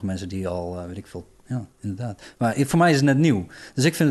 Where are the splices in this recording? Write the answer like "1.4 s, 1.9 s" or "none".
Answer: 1.4 s

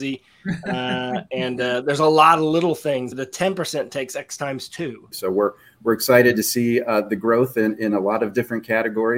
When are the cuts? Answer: 3.1 s, 5.1 s

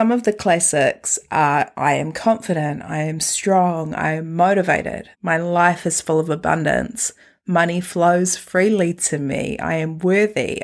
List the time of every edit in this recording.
5.1 s

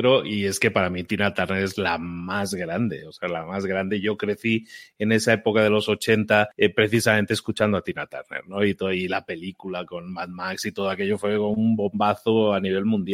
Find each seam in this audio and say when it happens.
none

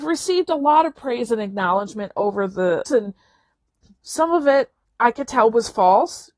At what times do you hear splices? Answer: 2.8 s

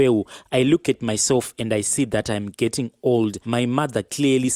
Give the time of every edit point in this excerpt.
3.4 s

